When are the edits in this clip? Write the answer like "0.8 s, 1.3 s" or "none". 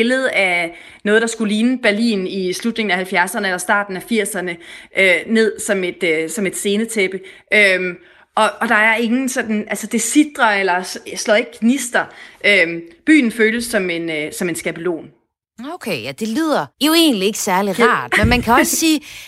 16.7 s